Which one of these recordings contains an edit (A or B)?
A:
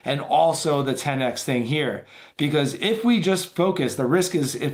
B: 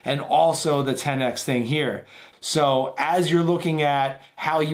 B